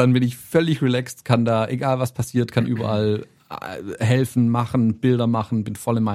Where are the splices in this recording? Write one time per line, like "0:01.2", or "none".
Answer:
none